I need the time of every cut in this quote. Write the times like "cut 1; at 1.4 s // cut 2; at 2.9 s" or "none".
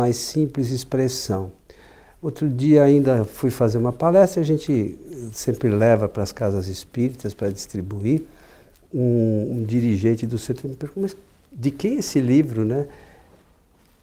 none